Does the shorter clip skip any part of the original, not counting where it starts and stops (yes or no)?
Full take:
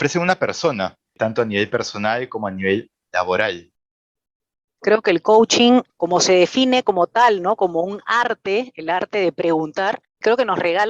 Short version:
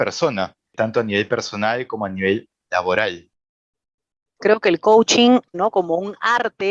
yes